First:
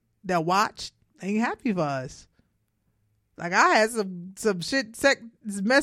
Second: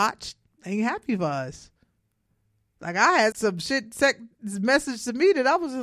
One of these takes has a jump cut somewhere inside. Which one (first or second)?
second